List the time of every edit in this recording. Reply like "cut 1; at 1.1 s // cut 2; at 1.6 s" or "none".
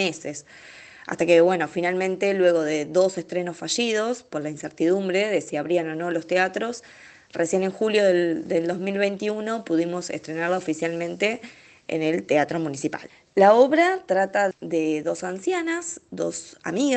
cut 1; at 14.5 s